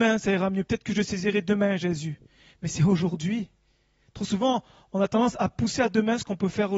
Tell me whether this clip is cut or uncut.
uncut